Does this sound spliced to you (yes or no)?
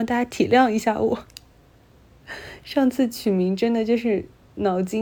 no